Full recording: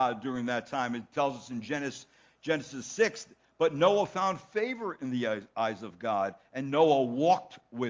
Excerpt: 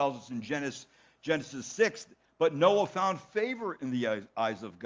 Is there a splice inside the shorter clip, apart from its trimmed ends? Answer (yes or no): no